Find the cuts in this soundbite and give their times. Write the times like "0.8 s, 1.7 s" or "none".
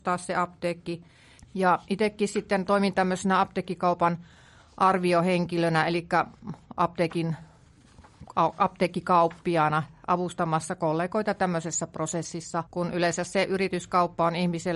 1.4 s, 12.7 s